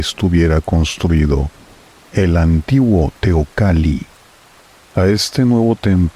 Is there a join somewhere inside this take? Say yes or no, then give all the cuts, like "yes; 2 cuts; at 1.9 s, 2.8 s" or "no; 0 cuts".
no; 0 cuts